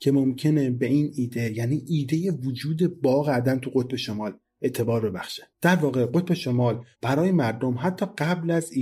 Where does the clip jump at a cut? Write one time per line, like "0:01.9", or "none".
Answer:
0:06.9